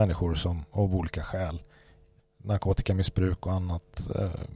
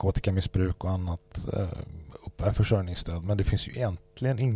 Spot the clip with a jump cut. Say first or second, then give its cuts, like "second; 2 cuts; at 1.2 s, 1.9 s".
first; 1 cut; at 2.2 s